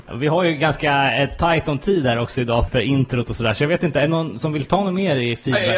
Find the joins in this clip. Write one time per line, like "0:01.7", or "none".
0:02.7